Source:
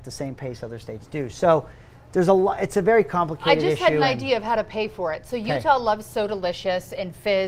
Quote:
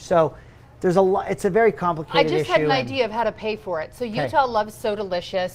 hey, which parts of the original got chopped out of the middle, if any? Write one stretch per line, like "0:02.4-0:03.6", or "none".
none